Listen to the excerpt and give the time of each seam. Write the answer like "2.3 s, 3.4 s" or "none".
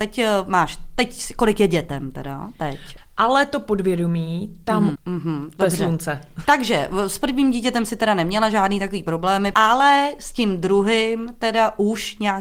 3.0 s, 5.0 s, 6.4 s